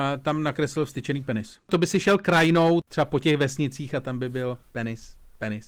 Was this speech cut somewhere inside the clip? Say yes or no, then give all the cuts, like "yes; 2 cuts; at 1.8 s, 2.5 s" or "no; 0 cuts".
yes; 1 cut; at 4.6 s